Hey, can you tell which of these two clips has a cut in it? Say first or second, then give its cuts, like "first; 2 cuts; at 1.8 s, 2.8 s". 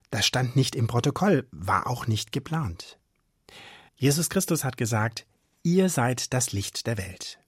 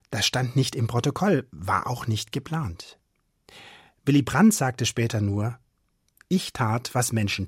first; 1 cut; at 3.9 s